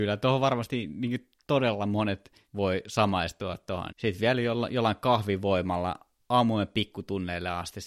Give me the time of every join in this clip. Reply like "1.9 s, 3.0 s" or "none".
3.9 s